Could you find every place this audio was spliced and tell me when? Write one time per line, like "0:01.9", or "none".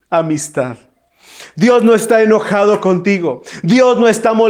0:01.5